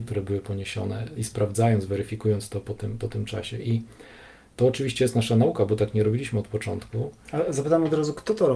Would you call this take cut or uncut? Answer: uncut